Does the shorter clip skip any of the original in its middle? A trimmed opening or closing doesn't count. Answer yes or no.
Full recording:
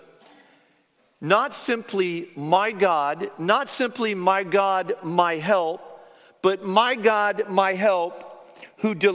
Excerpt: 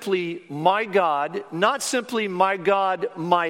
no